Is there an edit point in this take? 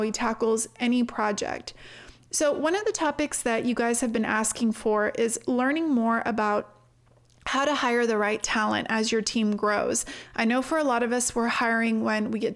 no; 0 cuts

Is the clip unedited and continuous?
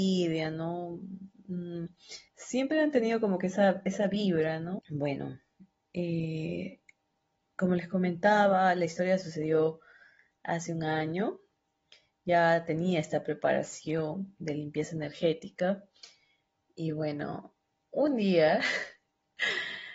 no; 2 cuts; at 2.3 s, 4.8 s

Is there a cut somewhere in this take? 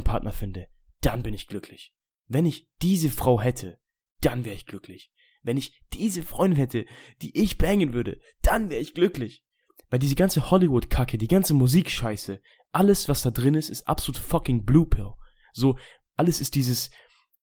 no; 0 cuts

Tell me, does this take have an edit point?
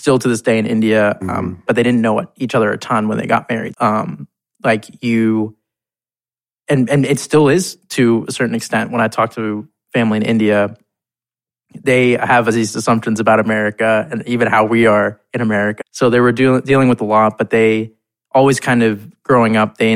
yes; 3 cuts; at 1.7 s, 3.7 s, 15.8 s

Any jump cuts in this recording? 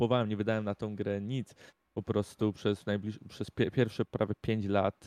no; 0 cuts

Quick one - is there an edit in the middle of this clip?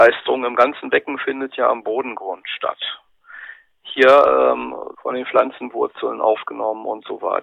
yes; 1 cut; at 4.9 s

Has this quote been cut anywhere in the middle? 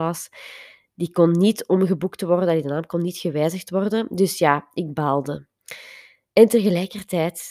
no; 0 cuts

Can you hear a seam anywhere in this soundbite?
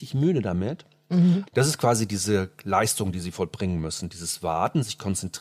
yes; 1 cut; at 1.5 s

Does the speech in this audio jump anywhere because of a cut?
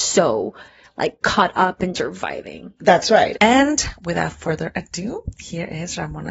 yes; 2 cuts; at 1.9 s, 3.3 s

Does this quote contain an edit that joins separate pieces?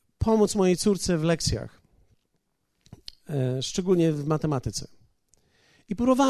no; 0 cuts

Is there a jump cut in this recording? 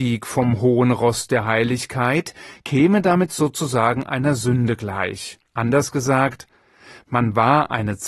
yes; 1 cut; at 5.5 s

